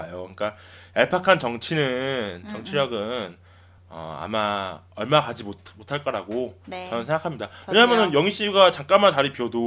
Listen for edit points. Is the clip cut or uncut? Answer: uncut